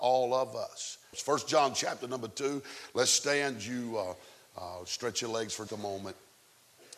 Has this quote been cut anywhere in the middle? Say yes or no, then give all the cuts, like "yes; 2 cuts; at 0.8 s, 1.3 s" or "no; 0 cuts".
yes; 2 cuts; at 1.1 s, 5.7 s